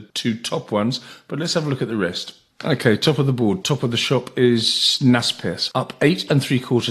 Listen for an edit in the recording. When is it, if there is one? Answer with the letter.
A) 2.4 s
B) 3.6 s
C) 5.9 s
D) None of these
B